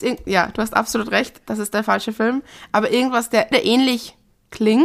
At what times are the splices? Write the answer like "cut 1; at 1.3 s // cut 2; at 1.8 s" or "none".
cut 1; at 3.5 s